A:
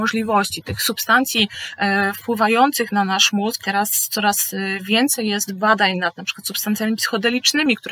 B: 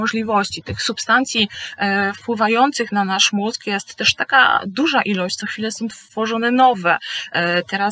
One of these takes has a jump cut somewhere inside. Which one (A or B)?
A